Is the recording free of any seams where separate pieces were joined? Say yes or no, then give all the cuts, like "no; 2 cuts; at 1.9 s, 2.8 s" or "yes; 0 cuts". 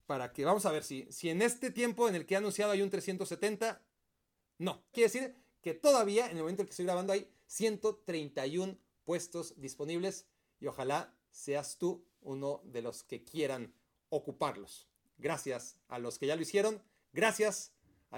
no; 2 cuts; at 4.9 s, 11.2 s